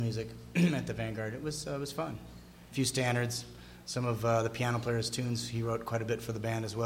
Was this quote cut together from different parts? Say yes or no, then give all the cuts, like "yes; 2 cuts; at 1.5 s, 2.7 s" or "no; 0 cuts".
yes; 1 cut; at 2.7 s